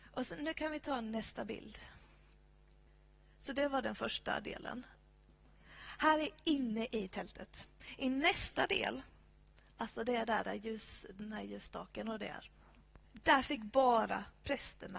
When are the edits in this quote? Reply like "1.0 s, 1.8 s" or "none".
none